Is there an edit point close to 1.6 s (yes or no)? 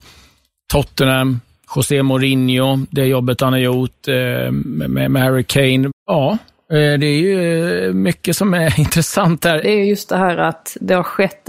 no